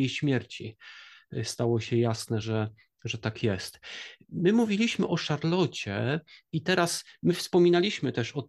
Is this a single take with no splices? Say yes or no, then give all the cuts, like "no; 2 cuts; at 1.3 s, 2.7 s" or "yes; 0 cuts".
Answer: yes; 0 cuts